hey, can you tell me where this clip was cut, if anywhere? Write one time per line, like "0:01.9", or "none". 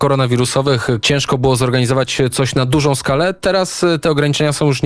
0:01.0